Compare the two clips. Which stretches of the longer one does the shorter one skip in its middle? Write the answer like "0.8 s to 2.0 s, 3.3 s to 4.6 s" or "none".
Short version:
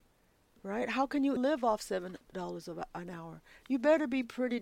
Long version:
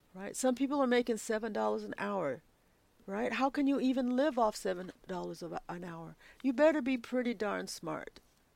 3.8 s to 4.1 s